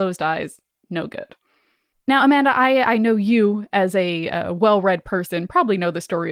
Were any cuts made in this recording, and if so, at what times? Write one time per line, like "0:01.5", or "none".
0:01.9